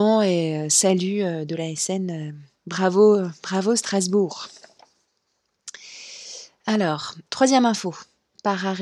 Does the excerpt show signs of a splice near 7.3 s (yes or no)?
yes